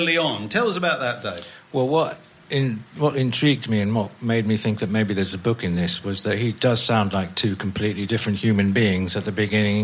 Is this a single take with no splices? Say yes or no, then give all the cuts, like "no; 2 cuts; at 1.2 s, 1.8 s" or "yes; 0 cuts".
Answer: yes; 0 cuts